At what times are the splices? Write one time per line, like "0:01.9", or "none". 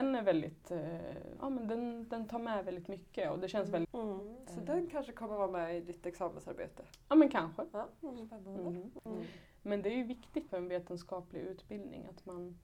0:03.8
0:09.1
0:10.5